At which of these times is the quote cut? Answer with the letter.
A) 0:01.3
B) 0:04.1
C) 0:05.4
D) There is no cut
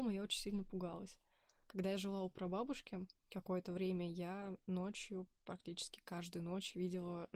D